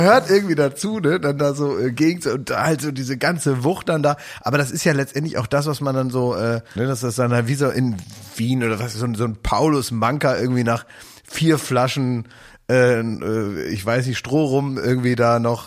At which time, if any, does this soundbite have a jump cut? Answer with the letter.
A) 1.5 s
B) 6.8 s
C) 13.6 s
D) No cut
B